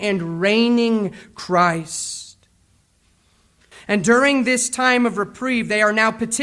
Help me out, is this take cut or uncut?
cut